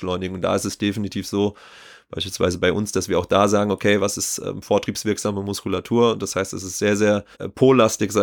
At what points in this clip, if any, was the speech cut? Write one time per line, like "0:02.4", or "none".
0:07.3